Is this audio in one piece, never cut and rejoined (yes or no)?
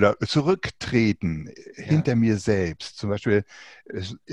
yes